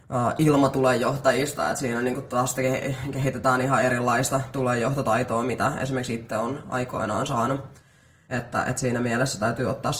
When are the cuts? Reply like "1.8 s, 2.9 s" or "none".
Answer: 8.3 s